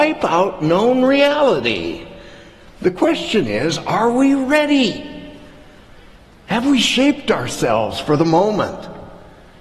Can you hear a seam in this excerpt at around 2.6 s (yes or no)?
no